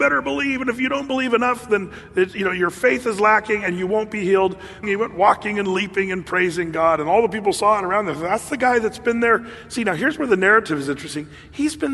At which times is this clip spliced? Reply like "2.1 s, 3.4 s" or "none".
4.8 s